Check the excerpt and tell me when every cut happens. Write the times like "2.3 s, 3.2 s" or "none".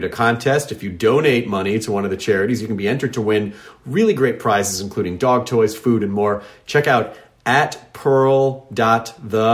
none